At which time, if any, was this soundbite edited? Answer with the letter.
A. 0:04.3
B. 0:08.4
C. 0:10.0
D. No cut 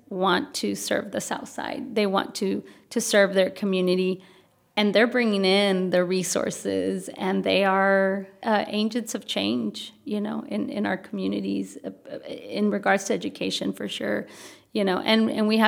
B